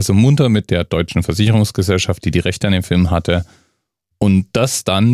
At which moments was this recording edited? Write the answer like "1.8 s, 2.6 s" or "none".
none